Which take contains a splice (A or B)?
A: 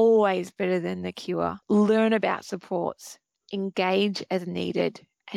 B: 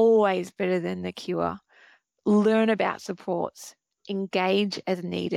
A